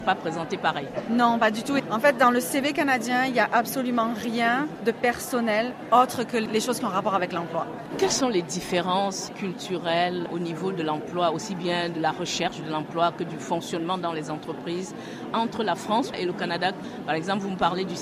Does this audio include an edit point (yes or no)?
yes